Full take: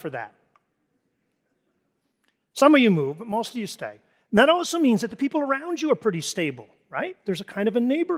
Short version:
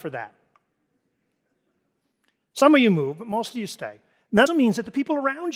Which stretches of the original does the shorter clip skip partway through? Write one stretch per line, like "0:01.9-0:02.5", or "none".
0:04.5-0:04.7